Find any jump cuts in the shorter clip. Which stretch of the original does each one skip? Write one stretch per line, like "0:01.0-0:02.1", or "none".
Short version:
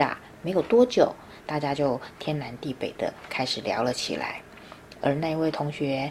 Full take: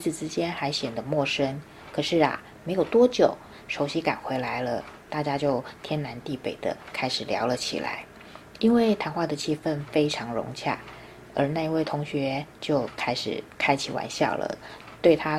0:03.6-0:05.0
0:08.6-0:11.3